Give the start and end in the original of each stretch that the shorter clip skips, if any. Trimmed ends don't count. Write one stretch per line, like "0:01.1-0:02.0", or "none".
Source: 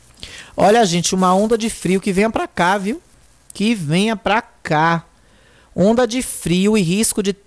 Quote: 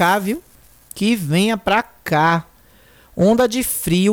none